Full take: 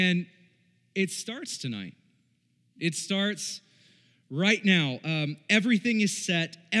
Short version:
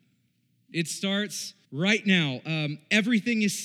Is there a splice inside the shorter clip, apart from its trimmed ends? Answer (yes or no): yes